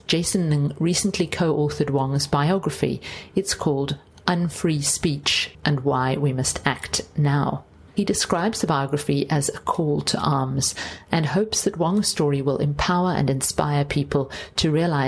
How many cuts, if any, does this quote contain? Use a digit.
1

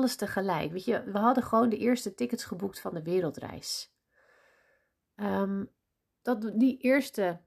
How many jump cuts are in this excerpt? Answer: 1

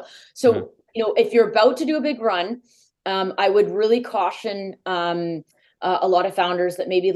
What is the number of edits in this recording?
0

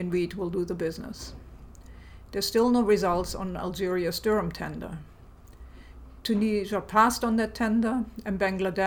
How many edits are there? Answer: 0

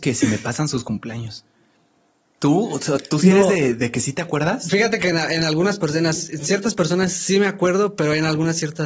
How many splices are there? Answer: 0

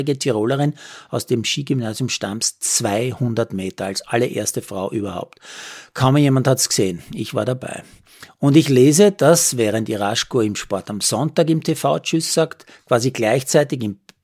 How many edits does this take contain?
0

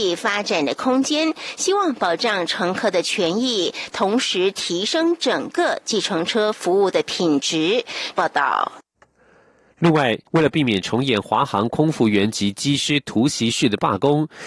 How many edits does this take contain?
2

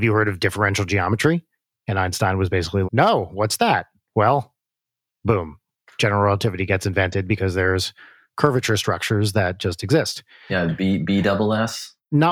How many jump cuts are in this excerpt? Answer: 2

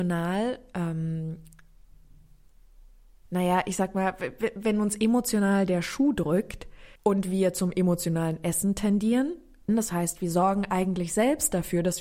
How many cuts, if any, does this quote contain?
2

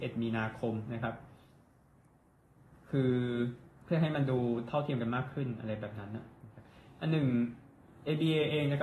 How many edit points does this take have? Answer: 1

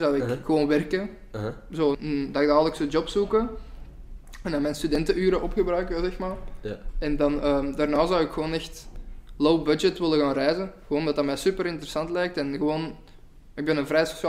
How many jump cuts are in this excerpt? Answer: 1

